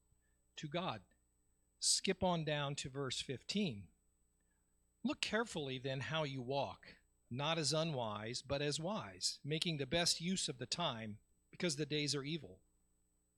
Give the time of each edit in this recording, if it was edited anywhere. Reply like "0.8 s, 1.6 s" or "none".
none